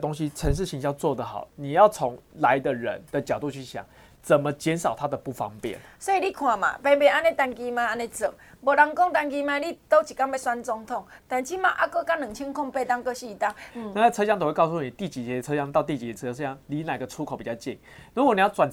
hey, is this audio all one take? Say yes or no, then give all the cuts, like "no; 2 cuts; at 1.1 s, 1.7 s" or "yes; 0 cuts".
no; 1 cut; at 13.7 s